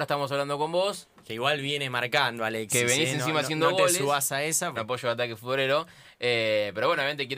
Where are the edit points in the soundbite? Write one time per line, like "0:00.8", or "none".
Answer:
0:04.8